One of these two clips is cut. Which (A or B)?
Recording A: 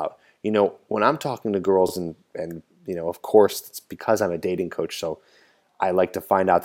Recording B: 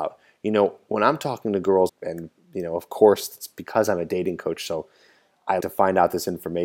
B